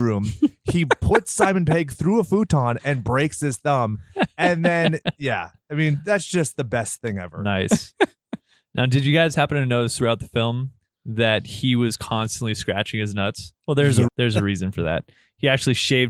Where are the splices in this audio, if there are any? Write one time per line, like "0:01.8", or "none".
0:14.1